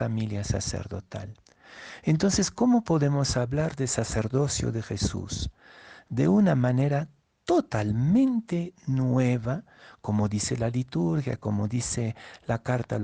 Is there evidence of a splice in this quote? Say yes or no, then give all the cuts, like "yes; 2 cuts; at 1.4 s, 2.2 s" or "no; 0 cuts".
no; 0 cuts